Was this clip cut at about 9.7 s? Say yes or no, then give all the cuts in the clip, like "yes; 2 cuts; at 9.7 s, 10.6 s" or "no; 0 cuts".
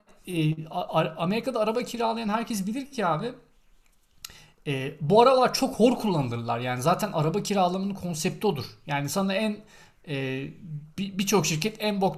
no; 1 cut; at 10.9 s